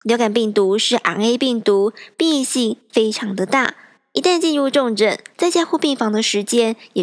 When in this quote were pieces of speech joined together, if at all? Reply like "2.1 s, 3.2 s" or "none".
5.3 s